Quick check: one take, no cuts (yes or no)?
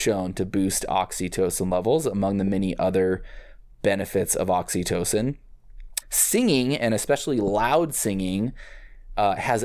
no